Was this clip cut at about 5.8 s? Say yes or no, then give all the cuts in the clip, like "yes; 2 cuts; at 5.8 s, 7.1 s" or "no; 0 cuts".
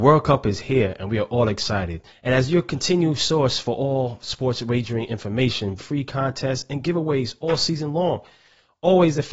yes; 2 cuts; at 2.1 s, 5.8 s